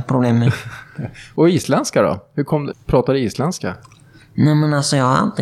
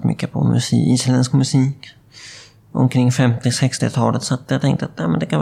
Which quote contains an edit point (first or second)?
first